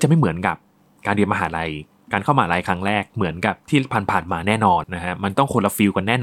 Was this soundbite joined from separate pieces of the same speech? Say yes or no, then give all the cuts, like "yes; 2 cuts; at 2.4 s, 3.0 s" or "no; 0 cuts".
yes; 1 cut; at 4.8 s